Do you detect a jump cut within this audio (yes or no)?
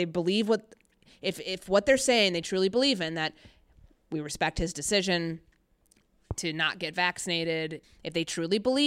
yes